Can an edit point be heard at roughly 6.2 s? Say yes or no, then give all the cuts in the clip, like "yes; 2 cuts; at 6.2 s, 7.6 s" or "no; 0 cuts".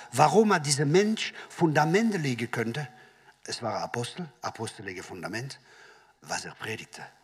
yes; 1 cut; at 6.2 s